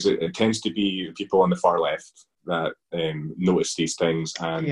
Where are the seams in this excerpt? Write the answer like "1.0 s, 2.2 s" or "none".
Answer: 2.4 s